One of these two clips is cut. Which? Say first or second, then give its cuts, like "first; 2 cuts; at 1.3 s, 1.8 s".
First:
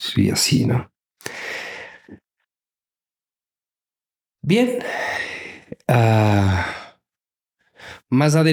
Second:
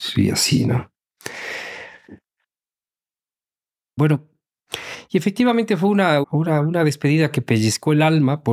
second; 2 cuts; at 4.0 s, 6.2 s